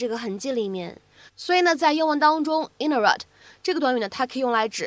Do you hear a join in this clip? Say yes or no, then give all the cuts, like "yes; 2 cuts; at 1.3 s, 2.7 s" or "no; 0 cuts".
yes; 1 cut; at 1.3 s